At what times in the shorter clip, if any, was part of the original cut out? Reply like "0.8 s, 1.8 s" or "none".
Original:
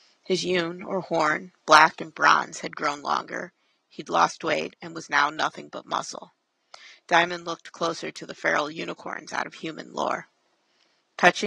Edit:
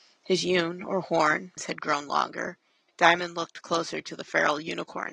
1.6 s, 2.9 s